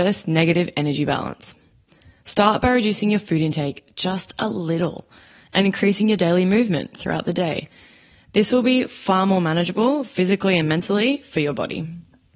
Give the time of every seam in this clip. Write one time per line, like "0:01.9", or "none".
none